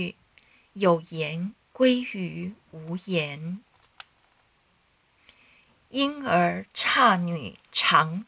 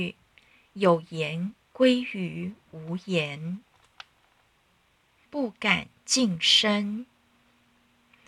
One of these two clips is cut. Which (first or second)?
second